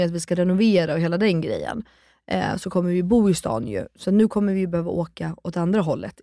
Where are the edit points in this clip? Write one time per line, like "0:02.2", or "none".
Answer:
none